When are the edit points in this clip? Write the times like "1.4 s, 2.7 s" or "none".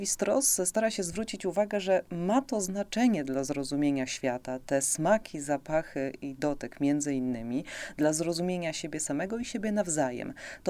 none